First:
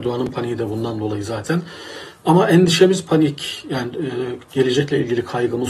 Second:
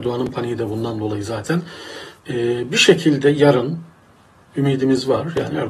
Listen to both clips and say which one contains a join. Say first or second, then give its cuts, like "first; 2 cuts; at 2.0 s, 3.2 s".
second; 1 cut; at 2.2 s